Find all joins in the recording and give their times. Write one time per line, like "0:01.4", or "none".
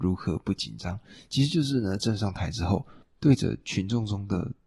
none